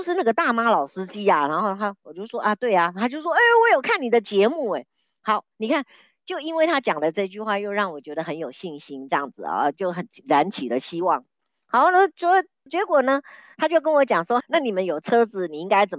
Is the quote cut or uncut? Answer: cut